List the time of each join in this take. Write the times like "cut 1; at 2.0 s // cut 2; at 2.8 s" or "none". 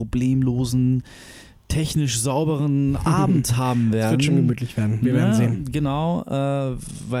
none